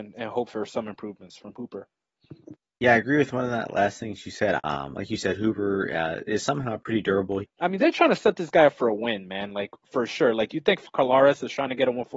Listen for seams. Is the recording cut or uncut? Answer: cut